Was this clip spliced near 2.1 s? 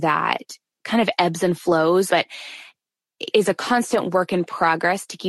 yes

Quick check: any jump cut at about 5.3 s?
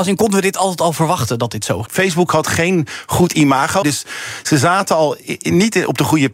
no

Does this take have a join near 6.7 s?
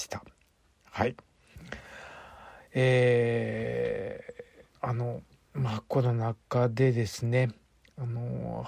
no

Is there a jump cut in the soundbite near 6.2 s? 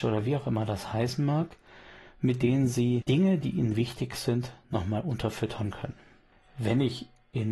no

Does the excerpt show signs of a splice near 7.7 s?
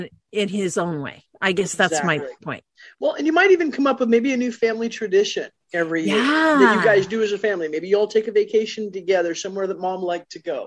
no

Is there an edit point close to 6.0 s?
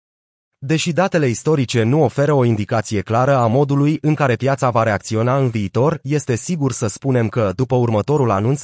yes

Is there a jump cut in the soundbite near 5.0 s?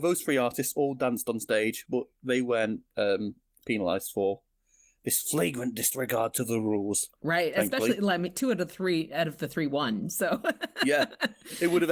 no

